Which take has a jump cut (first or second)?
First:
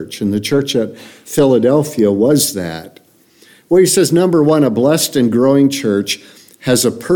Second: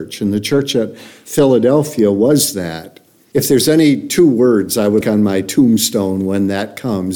second